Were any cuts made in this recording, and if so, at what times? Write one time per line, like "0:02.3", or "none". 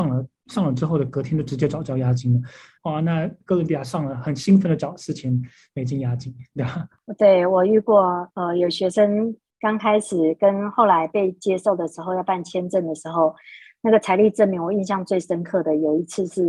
0:02.8